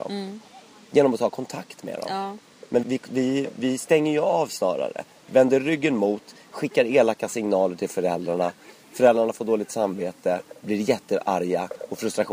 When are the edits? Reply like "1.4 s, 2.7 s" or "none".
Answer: 2.8 s